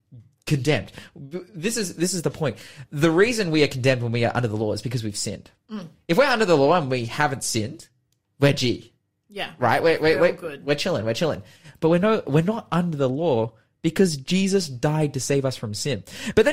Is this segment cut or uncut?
uncut